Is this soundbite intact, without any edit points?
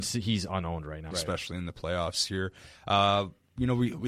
no; 1 cut; at 1.1 s

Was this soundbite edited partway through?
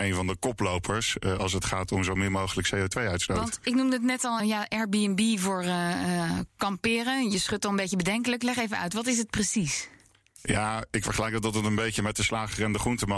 yes; 1 cut; at 4.4 s

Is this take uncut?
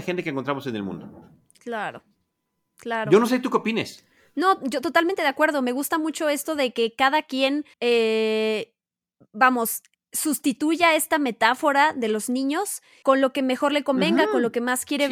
no; 2 cuts; at 7.7 s, 13.0 s

